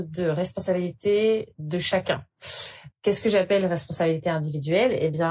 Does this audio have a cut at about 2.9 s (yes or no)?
yes